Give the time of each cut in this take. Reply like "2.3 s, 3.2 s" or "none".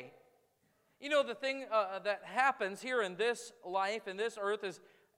none